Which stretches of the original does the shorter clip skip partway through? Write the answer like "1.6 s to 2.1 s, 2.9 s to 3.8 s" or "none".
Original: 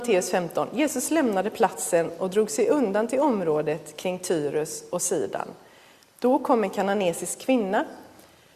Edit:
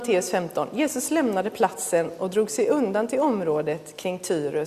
none

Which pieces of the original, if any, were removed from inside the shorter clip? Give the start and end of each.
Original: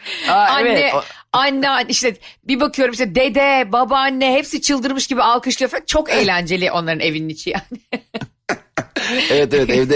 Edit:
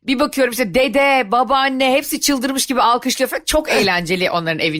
none

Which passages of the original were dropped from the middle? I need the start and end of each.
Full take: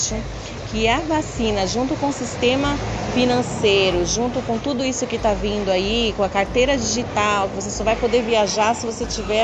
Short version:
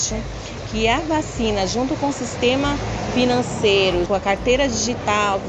4.1 s to 6.1 s

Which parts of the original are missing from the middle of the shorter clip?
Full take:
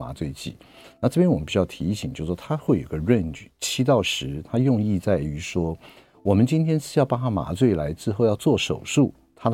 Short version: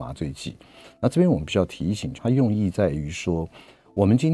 2.2 s to 4.4 s

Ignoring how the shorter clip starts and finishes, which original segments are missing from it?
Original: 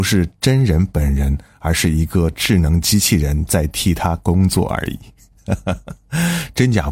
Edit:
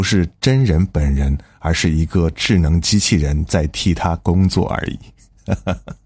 none

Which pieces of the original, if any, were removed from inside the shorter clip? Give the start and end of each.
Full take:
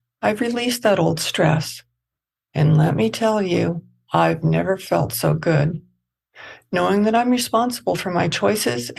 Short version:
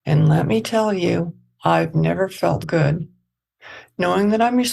5.1 s to 5.4 s

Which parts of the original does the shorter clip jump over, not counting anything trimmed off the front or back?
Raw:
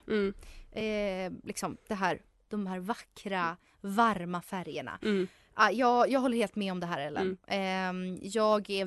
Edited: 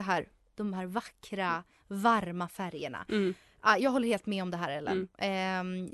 5.7 s to 6.1 s

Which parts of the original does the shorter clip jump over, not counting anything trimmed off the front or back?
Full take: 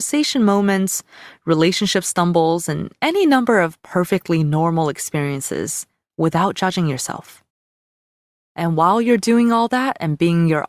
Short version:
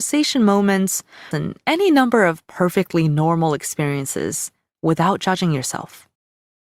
1.3 s to 2.7 s

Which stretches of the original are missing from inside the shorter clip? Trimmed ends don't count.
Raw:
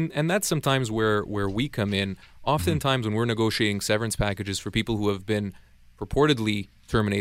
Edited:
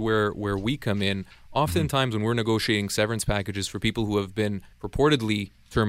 5.6 s to 5.9 s

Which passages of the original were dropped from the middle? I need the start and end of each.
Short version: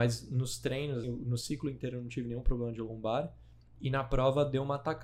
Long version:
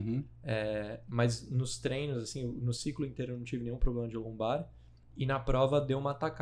2.2 s to 2.4 s

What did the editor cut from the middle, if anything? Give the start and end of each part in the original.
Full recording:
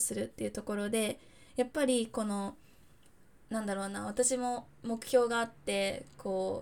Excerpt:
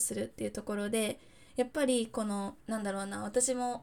2.6 s to 3.4 s

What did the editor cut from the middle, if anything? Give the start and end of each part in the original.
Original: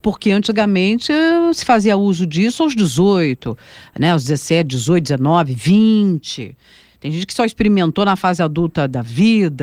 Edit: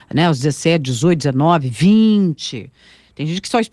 none

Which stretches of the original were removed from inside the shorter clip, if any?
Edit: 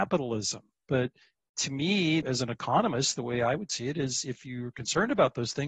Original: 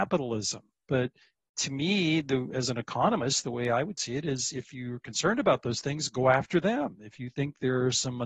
2.2 s to 2.5 s

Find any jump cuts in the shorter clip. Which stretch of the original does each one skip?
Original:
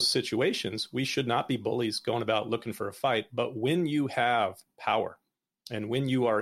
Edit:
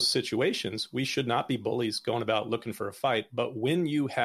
none

